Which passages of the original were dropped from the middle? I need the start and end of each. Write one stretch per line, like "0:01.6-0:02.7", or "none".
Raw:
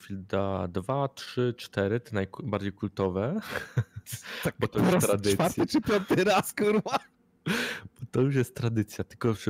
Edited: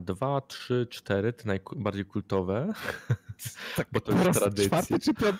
none